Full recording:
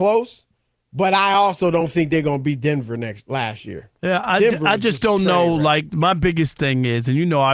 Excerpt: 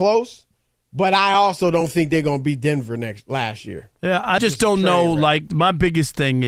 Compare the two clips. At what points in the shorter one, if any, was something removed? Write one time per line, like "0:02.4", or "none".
0:04.4

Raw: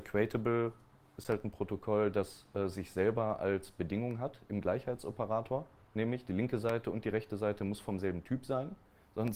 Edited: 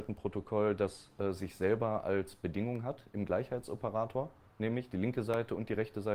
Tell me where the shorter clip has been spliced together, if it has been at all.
none

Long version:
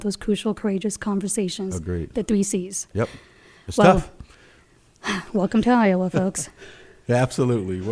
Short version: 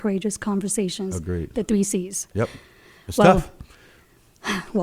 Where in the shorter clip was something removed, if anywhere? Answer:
none

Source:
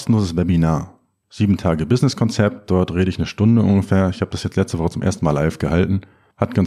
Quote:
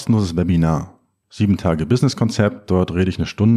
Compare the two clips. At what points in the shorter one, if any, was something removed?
none

